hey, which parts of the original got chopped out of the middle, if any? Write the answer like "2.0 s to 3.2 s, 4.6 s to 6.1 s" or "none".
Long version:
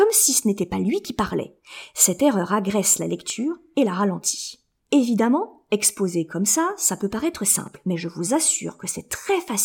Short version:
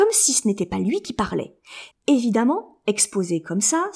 1.9 s to 4.8 s